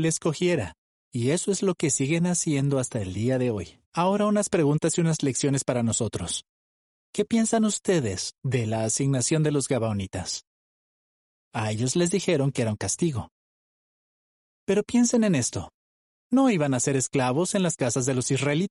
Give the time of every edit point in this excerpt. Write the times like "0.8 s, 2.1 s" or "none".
3.8 s